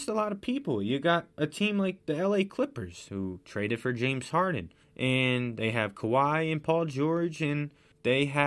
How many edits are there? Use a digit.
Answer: 0